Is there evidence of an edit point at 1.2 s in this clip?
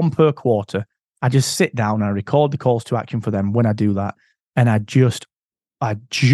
no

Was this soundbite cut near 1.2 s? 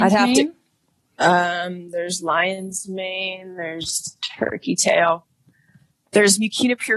no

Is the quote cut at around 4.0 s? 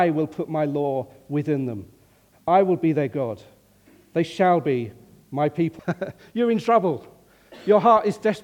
no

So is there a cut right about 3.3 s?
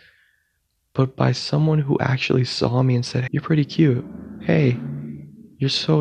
yes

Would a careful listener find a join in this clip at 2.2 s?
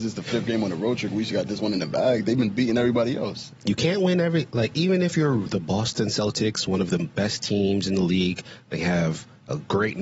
no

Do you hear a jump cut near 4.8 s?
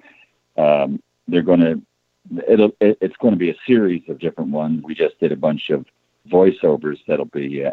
yes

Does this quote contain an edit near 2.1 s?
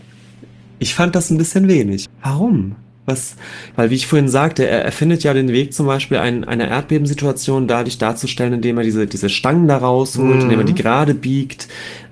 yes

